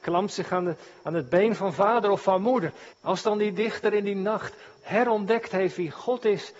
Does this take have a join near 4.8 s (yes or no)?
yes